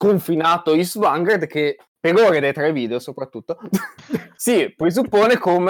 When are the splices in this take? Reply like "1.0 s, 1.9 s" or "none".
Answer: none